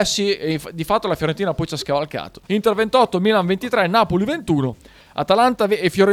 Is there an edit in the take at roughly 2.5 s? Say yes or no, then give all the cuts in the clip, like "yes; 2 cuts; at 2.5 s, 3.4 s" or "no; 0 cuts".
yes; 1 cut; at 2.5 s